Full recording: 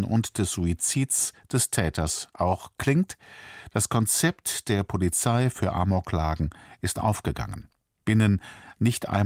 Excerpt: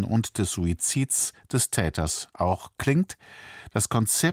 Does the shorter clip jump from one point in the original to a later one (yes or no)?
no